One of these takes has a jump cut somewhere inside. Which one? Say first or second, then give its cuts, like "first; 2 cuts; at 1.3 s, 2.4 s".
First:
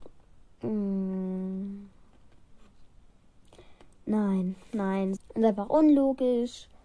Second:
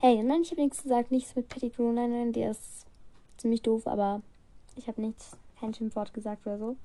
first; 1 cut; at 5.2 s